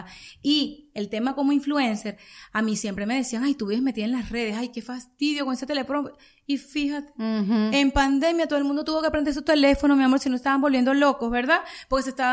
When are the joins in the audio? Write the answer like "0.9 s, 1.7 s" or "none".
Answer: none